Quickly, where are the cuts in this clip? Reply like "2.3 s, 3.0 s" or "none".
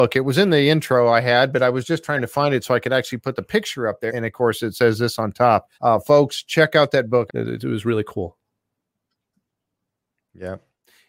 4.1 s, 5.7 s, 7.3 s